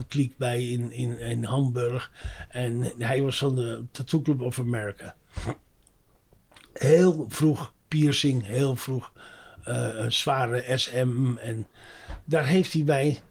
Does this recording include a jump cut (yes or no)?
no